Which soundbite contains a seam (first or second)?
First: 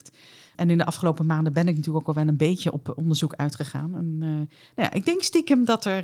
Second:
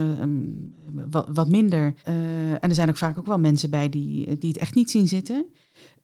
second